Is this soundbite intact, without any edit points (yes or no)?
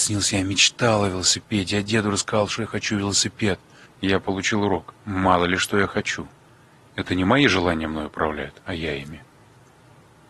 no